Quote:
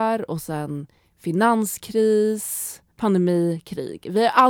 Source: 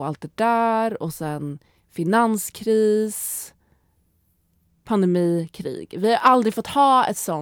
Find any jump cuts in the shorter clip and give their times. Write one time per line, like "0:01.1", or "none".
0:02.9